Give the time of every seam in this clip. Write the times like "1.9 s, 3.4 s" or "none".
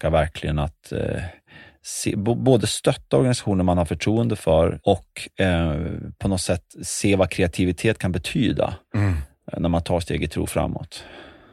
4.8 s